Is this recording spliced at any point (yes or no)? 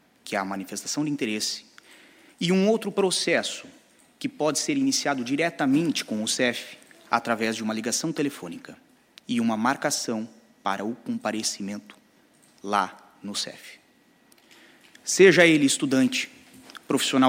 yes